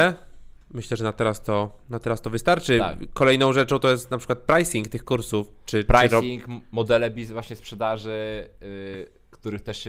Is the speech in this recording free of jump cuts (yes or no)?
yes